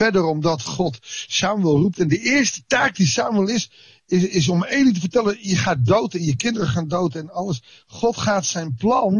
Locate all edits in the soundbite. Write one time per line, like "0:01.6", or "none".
none